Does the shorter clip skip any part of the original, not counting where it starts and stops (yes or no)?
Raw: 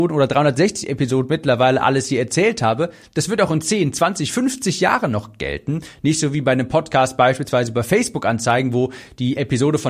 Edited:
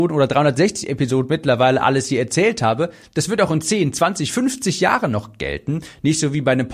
no